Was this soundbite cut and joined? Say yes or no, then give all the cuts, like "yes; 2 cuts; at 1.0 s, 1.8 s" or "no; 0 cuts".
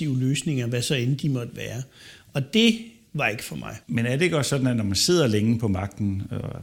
yes; 1 cut; at 3.8 s